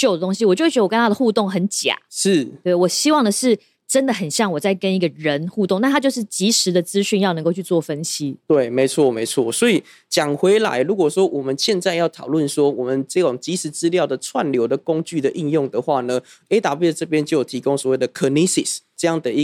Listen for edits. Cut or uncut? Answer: uncut